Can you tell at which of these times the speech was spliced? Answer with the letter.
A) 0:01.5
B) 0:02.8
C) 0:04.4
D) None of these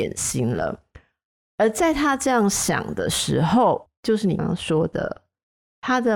C